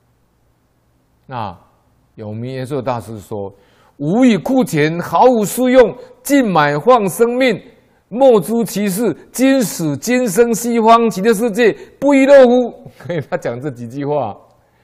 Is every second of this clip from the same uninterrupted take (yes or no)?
yes